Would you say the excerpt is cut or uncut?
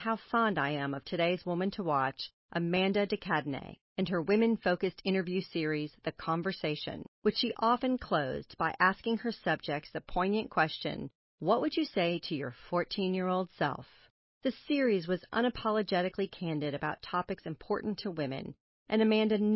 uncut